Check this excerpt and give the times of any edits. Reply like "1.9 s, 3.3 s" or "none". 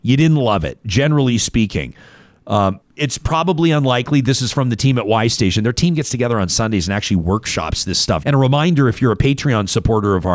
2.8 s, 8.2 s